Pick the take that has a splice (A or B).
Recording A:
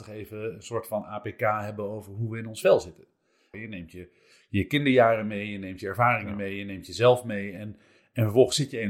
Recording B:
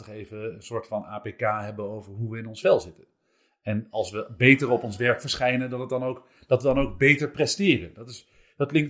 A